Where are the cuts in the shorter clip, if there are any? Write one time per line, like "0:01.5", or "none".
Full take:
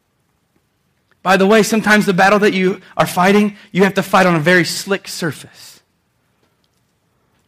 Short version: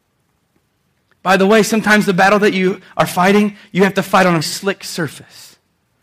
0:04.4